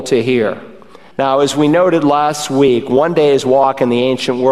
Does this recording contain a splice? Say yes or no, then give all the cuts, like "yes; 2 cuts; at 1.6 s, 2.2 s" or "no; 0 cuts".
yes; 1 cut; at 1.1 s